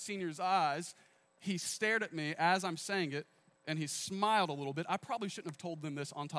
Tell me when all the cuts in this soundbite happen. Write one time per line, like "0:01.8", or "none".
0:01.3